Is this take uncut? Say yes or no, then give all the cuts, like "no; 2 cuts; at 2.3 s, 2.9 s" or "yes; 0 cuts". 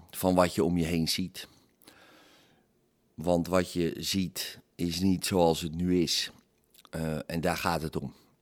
yes; 0 cuts